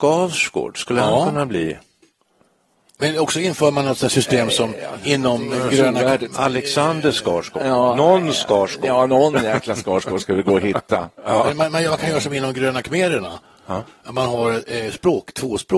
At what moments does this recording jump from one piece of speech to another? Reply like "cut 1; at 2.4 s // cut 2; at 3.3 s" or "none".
none

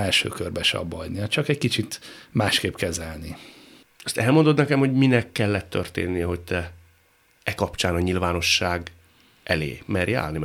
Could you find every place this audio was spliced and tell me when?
none

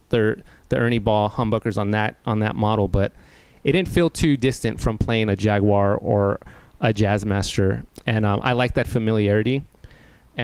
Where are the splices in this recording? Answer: none

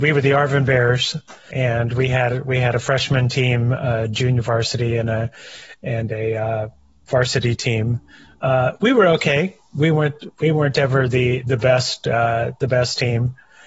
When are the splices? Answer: cut 1; at 1.5 s

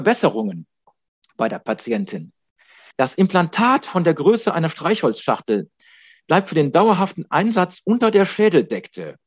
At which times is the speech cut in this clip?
cut 1; at 2.9 s

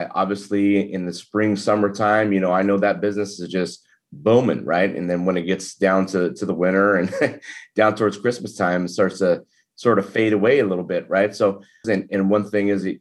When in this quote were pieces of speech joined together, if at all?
cut 1; at 11.8 s

